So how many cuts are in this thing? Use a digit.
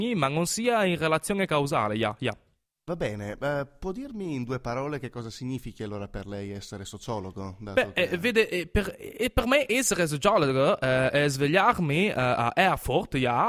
0